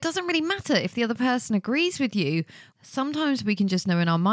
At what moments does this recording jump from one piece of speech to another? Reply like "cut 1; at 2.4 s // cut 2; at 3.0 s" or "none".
cut 1; at 2.7 s